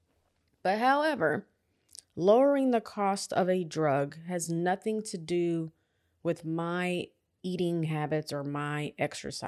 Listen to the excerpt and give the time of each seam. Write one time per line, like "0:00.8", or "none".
none